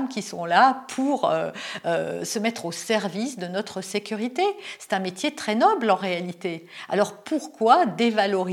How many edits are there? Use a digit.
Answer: 0